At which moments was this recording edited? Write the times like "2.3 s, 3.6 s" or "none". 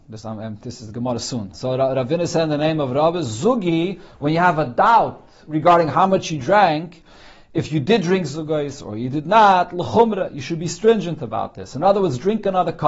1.5 s